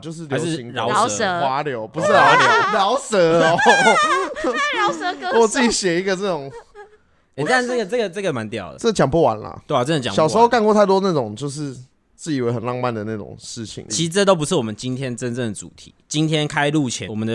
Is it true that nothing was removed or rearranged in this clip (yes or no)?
yes